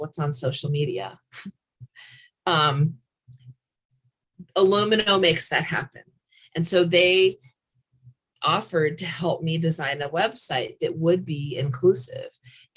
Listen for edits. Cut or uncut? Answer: uncut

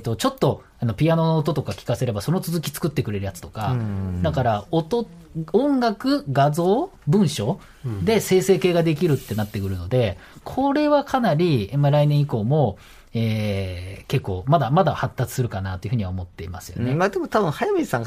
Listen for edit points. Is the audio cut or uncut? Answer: uncut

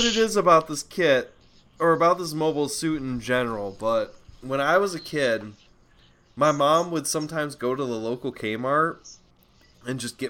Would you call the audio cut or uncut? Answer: uncut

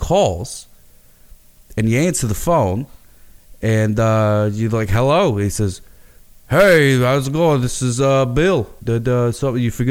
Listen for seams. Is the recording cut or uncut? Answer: cut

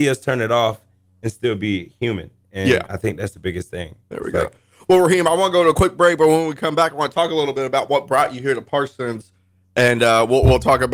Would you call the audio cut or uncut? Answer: uncut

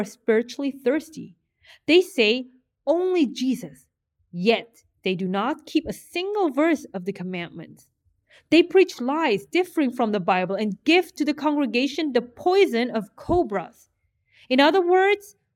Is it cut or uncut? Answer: uncut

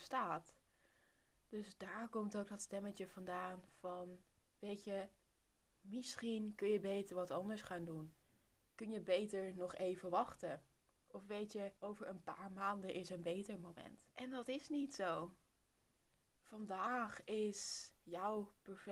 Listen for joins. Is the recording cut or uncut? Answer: cut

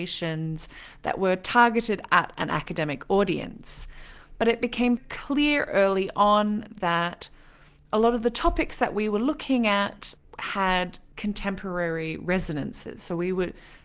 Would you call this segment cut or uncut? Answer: cut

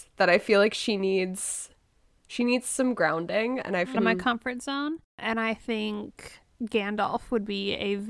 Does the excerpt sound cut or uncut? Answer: cut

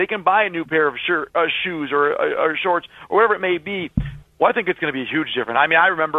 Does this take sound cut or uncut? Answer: cut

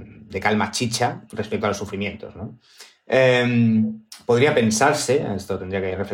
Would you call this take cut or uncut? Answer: uncut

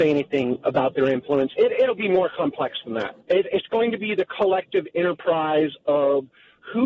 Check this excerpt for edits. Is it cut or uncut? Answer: cut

